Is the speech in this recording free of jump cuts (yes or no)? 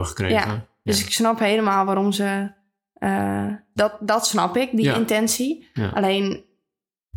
yes